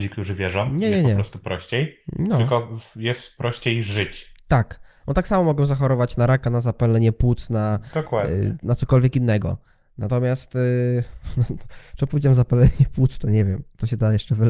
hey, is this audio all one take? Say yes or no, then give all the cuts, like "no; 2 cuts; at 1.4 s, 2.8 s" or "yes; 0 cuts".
yes; 0 cuts